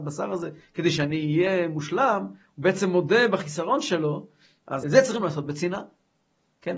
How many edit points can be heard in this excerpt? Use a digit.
1